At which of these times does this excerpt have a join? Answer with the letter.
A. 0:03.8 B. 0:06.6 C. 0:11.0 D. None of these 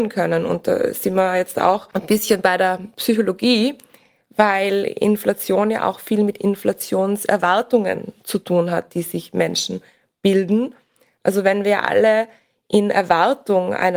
D